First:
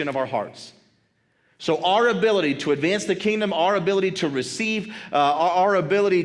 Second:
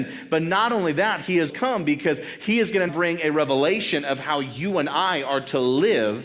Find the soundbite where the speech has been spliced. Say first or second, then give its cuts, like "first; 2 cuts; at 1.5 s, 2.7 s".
second; 2 cuts; at 1.5 s, 2.9 s